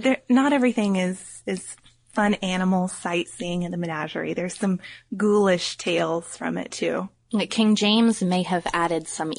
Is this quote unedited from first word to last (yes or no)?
yes